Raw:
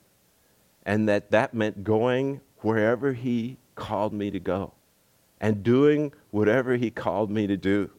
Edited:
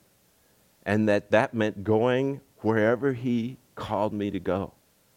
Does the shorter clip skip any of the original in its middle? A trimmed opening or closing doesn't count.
no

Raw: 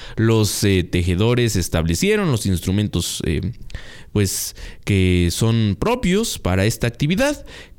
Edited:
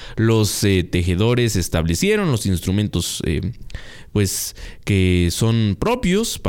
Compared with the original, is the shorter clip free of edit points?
yes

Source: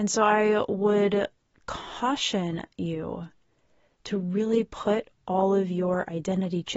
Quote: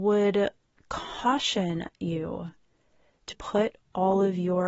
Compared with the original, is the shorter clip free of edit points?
no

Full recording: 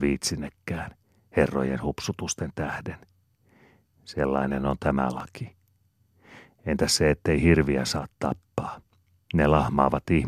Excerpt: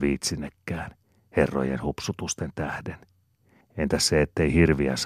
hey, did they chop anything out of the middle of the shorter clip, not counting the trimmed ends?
yes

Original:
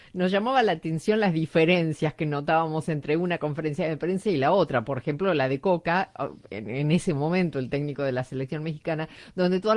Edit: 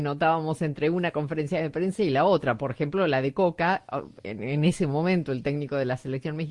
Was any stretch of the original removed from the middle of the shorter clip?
no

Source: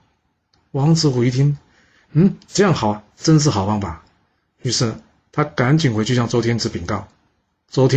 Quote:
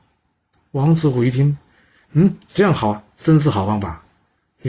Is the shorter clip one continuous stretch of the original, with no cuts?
yes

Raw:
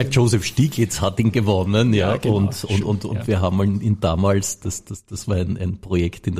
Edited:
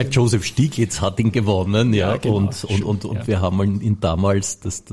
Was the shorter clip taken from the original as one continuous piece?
yes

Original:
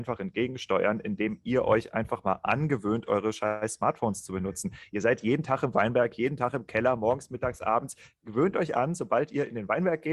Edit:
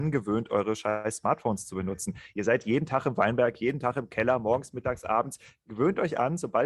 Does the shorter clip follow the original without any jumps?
yes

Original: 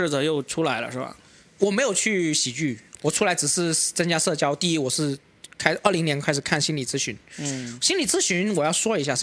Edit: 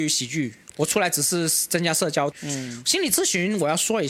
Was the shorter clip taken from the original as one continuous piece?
no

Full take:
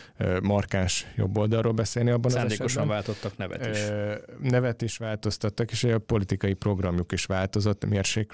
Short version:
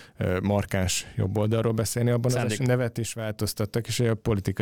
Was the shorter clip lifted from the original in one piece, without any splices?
no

